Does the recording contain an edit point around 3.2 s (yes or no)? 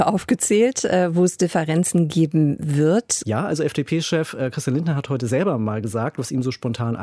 yes